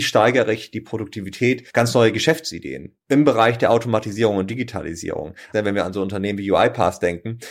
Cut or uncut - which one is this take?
cut